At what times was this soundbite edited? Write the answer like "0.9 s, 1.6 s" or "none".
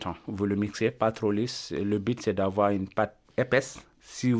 none